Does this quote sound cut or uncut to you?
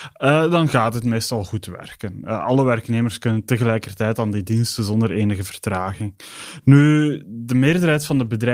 uncut